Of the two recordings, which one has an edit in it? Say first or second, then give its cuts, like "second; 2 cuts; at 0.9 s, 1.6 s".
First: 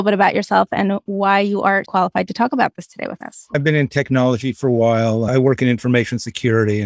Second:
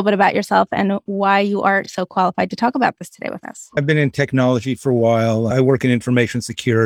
first; 1 cut; at 1.8 s